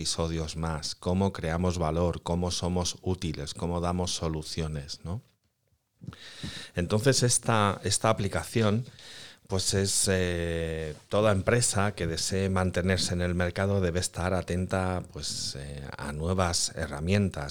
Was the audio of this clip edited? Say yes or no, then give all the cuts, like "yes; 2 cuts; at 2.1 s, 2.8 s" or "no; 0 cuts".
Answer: no; 0 cuts